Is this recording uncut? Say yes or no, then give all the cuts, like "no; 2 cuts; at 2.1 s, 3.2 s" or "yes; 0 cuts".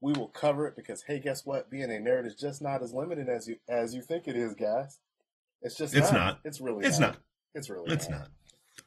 yes; 0 cuts